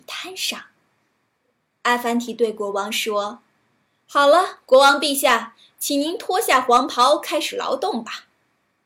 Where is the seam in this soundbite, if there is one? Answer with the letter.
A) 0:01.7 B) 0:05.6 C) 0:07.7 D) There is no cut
D